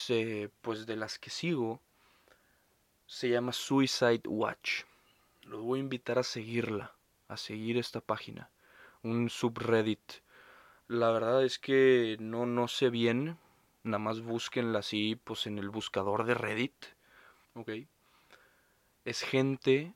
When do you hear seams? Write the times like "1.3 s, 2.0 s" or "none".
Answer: 17.4 s